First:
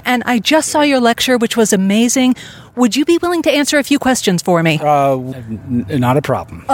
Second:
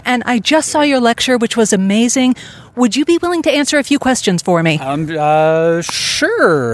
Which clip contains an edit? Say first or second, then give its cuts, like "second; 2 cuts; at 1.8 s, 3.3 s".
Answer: first; 1 cut; at 4.8 s